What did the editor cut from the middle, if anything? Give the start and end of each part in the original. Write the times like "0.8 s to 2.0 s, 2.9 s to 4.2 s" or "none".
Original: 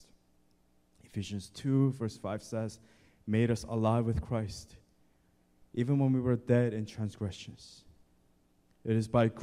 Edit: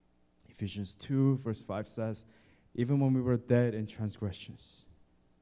3.2 s to 5.6 s